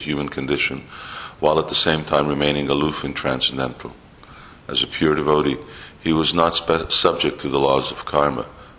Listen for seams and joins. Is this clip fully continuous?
yes; 0 cuts

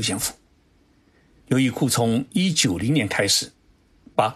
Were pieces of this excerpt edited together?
yes; 2 cuts; at 1.4 s, 2.5 s

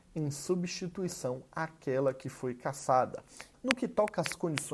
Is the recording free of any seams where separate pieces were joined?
no; 1 cut; at 3.5 s

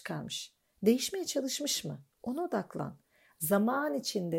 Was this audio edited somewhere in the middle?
no; 0 cuts

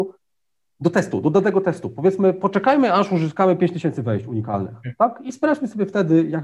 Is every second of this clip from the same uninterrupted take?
yes; 0 cuts

